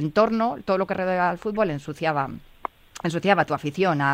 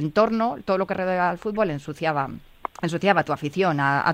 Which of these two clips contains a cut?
second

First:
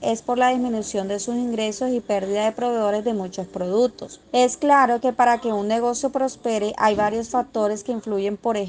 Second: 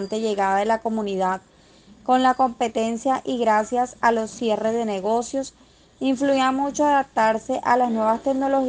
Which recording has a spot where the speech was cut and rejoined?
first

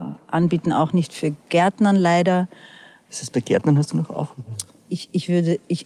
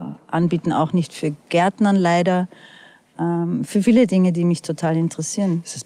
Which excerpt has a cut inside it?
first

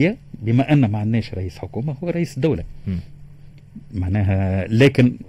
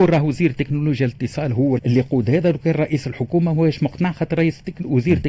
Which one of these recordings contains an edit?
second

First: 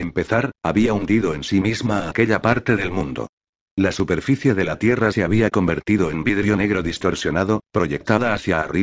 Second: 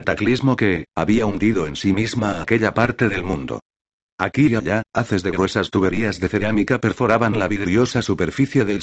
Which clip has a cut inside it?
second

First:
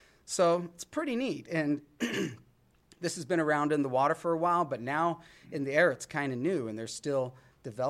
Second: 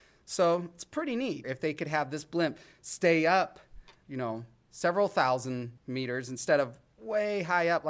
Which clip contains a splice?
second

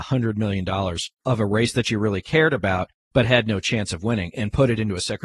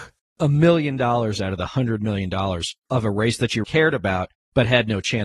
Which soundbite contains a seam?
second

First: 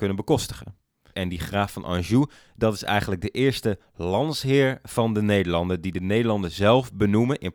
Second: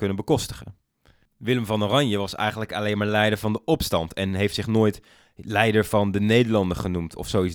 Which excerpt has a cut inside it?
first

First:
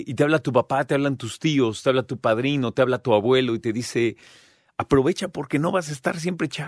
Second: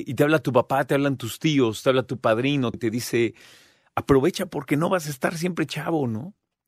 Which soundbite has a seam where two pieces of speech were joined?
second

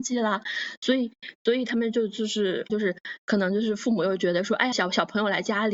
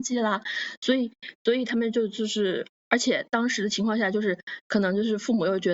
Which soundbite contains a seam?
first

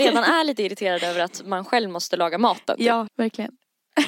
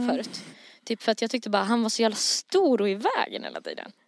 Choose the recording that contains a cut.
first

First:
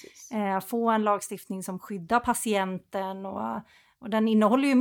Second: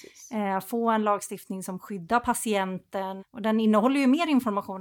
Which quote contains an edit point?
second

